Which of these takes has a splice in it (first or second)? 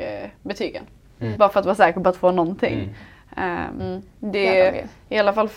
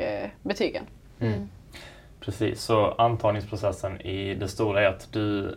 first